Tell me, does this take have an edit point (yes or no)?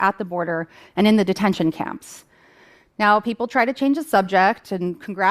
no